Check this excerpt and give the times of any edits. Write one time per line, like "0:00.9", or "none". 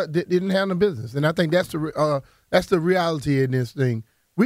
none